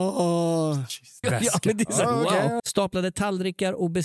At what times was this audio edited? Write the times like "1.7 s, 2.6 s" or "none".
1.2 s, 2.6 s